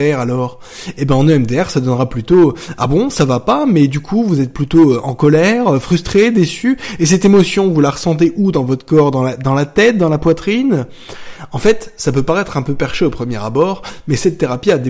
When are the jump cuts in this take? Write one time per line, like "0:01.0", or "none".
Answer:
none